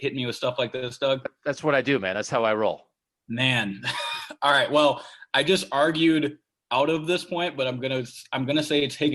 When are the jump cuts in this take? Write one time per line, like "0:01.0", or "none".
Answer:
none